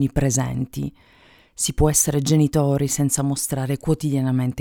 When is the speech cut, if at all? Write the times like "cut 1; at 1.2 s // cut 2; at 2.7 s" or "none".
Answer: none